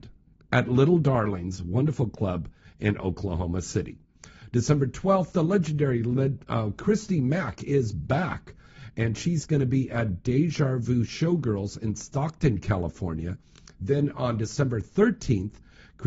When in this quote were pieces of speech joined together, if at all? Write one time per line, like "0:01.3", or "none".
none